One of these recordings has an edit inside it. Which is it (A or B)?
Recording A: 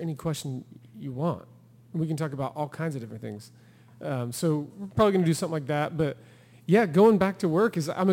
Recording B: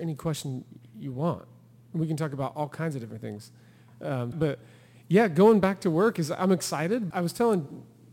B